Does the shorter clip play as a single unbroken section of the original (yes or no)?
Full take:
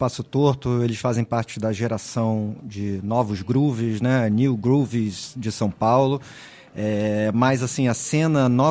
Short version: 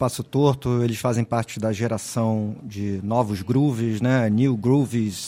yes